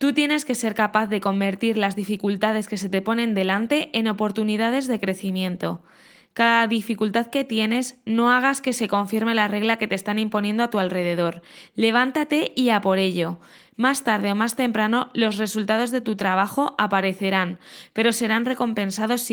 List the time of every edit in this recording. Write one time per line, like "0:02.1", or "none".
0:17.9